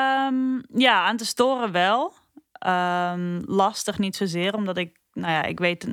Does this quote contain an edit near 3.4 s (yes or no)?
no